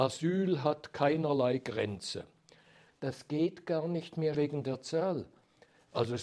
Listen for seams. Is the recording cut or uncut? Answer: cut